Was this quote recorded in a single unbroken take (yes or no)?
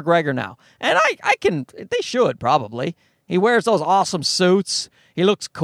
yes